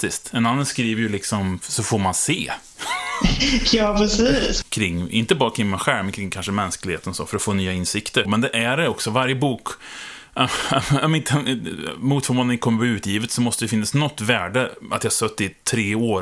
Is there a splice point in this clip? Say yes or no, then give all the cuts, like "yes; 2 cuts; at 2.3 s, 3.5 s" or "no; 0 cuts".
yes; 2 cuts; at 4.6 s, 8.2 s